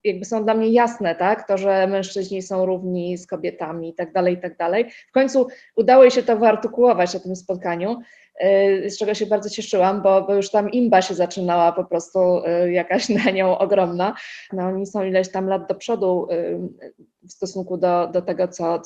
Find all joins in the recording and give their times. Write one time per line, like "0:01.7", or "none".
0:14.5